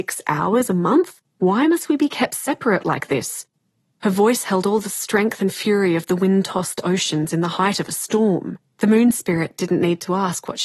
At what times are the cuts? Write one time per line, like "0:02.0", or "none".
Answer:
0:08.7